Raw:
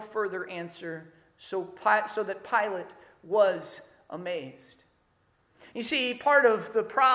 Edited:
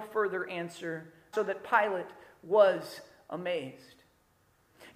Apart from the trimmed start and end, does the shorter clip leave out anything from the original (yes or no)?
yes